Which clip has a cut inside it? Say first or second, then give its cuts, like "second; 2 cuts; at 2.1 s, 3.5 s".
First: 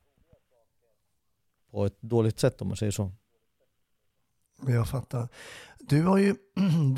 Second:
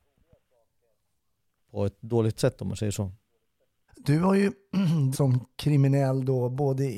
second; 2 cuts; at 3.9 s, 5.1 s